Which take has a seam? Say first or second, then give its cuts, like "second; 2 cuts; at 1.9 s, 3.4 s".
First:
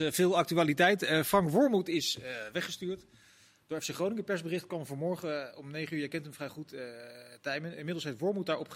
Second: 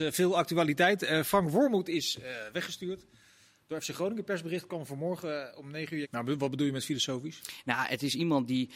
second; 1 cut; at 6.0 s